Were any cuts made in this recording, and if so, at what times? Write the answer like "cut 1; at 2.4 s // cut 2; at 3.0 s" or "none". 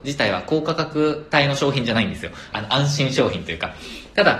cut 1; at 2.5 s